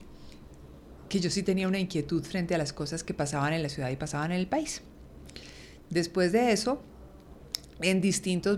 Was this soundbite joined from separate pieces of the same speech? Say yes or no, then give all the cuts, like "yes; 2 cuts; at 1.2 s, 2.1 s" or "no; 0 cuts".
no; 0 cuts